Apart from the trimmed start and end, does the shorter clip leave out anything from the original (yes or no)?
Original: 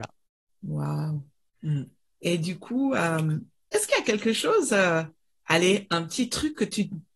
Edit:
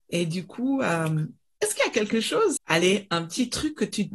yes